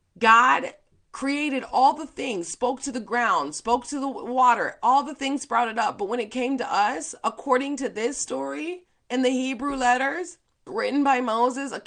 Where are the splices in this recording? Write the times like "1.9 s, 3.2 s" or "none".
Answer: 10.7 s